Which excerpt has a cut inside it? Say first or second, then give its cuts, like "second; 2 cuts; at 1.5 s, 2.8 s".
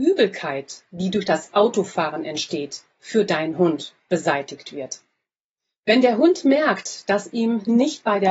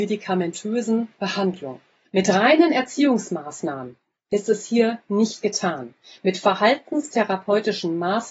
second; 1 cut; at 2.1 s